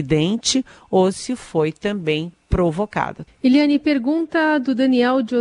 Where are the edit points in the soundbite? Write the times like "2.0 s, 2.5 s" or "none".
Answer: 3.3 s